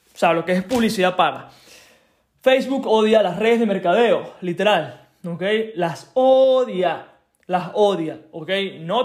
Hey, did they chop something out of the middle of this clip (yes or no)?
no